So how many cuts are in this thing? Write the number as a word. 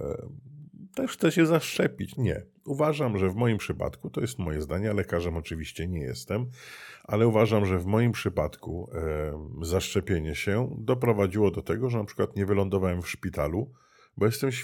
one